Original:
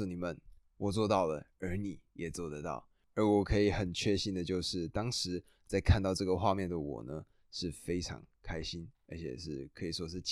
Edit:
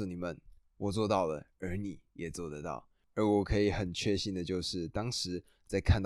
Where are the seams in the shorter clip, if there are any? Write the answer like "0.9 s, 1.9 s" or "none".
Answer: none

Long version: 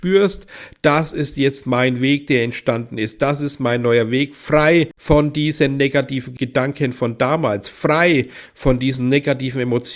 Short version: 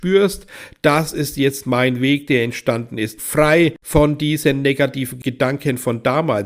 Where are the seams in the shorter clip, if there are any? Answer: 3.2 s

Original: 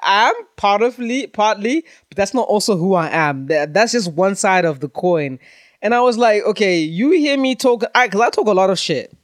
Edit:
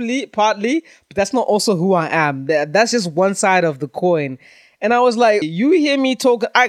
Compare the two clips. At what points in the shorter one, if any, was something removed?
5.4 s

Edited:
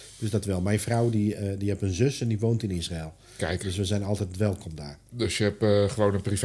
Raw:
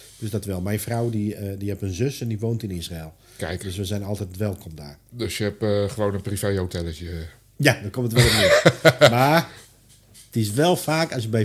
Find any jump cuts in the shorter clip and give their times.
none

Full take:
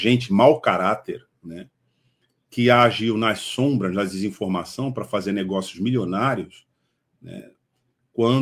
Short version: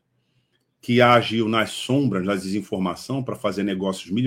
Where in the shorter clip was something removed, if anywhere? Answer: none

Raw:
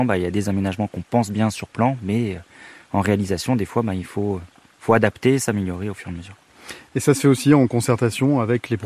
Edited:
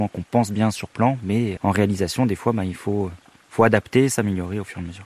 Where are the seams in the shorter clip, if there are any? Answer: 1.6 s

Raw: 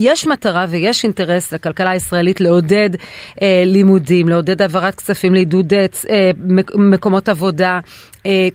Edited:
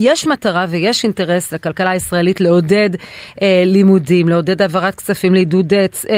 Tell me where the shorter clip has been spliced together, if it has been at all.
none

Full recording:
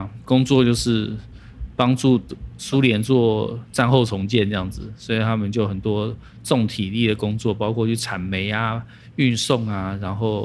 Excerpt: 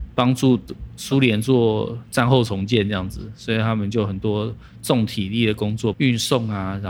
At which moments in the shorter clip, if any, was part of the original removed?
5.9 s

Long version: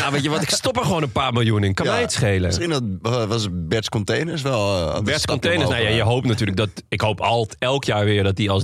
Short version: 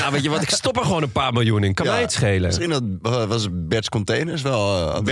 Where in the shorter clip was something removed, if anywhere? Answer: none

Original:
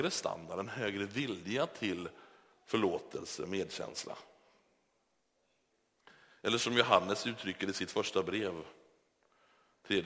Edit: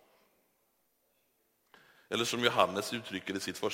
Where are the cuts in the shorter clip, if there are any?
none

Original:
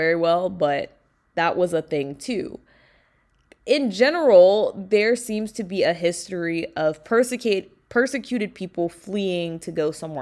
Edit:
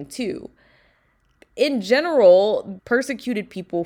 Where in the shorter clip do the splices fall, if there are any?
2.8 s

